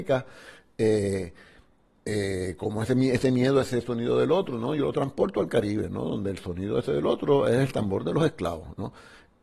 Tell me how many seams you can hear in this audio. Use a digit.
0